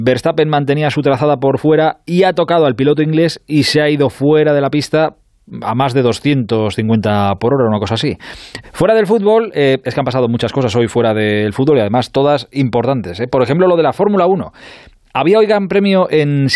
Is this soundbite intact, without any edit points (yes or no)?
no